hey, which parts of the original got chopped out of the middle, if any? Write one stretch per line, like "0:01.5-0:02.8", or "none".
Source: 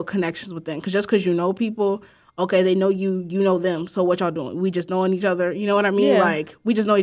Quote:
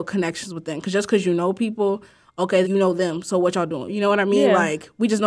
0:02.6-0:03.3
0:04.5-0:05.5